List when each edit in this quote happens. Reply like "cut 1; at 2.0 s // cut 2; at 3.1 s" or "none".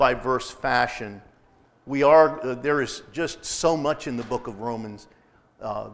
cut 1; at 1.7 s